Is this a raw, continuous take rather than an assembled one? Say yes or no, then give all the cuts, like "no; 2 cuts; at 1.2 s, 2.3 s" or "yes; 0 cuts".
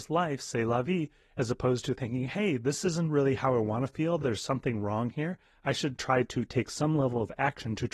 yes; 0 cuts